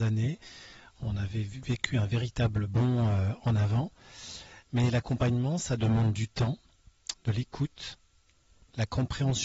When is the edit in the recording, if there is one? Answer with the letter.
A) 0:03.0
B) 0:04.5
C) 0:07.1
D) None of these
C